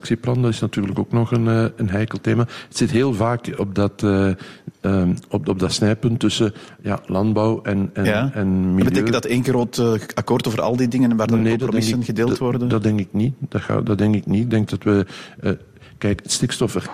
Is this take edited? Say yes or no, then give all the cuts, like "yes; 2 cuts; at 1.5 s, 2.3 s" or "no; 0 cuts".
no; 0 cuts